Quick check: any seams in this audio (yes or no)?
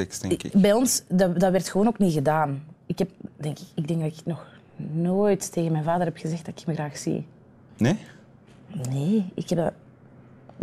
no